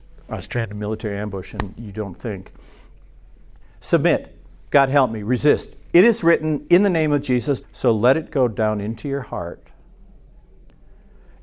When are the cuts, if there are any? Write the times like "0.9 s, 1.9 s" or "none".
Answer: 7.6 s